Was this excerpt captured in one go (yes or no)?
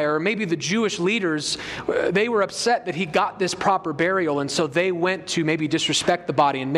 yes